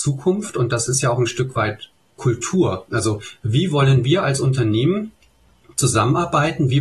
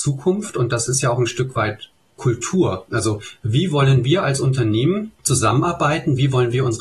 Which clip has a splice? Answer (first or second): second